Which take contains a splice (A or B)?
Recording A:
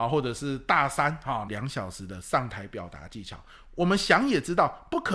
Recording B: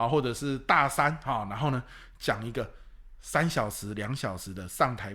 A